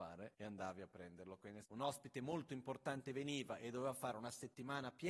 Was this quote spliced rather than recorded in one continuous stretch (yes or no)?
yes